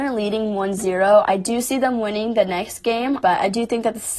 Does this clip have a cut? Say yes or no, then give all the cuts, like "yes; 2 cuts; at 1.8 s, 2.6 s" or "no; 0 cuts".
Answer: yes; 1 cut; at 3.2 s